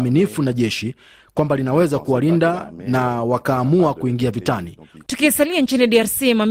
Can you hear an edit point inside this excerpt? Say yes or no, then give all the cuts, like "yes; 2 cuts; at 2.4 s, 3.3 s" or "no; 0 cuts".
yes; 1 cut; at 5.0 s